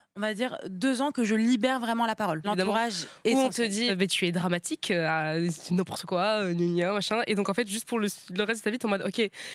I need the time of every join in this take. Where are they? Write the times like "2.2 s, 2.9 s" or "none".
2.4 s, 3.9 s